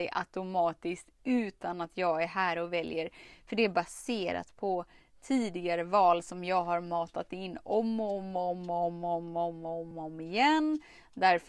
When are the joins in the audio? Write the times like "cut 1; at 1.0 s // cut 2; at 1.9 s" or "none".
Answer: cut 1; at 9.9 s